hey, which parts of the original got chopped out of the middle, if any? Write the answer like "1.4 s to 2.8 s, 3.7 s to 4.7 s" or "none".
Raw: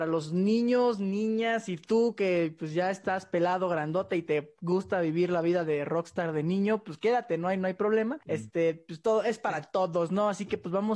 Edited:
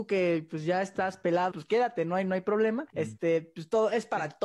3.6 s to 6.8 s

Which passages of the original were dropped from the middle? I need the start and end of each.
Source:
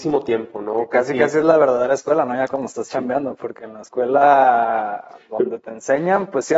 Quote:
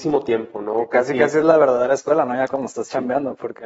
none

